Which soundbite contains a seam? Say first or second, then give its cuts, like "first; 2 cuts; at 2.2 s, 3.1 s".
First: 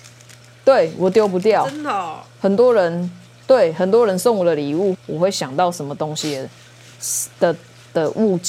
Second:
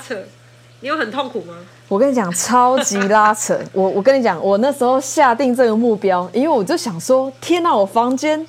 first; 1 cut; at 4.9 s